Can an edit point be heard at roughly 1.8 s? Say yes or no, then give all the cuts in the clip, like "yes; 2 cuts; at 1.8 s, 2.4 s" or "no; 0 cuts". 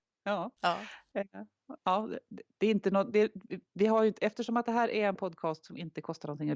yes; 1 cut; at 1.8 s